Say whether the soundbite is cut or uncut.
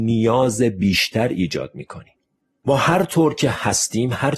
uncut